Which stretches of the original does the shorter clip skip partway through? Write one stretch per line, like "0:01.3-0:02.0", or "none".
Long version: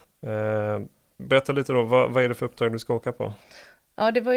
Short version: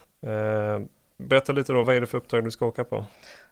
0:01.8-0:02.1